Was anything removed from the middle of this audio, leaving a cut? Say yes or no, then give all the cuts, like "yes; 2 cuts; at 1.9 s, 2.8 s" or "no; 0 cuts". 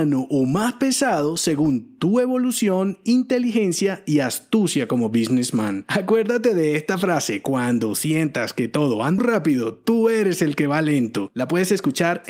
yes; 1 cut; at 9.2 s